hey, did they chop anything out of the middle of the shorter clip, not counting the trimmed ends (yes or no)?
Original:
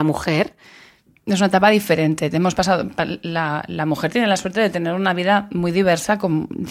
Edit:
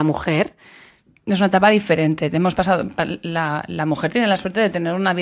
no